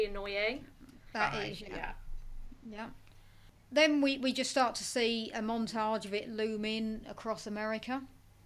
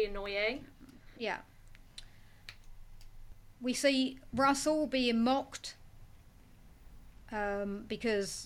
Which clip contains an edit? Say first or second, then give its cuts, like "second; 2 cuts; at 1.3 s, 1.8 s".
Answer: first; 1 cut; at 1.1 s